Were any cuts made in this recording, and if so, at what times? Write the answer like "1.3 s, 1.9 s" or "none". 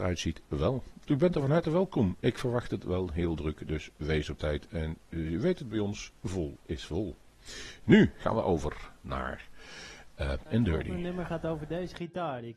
10.5 s